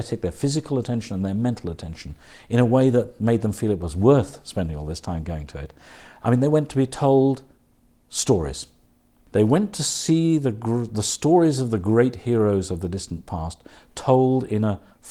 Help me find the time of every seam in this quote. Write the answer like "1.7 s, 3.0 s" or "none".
none